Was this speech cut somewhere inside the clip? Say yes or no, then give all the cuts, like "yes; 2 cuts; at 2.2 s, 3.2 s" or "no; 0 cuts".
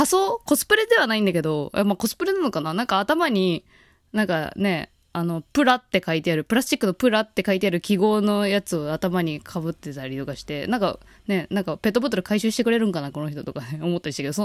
no; 0 cuts